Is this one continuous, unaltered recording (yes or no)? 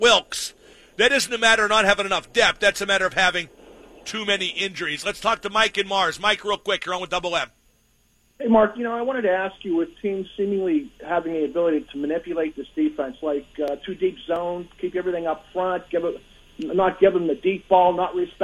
no